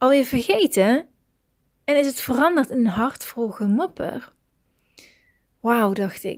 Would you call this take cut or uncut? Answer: uncut